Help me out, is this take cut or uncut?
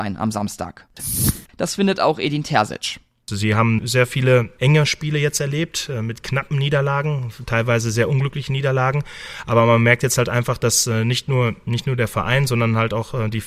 cut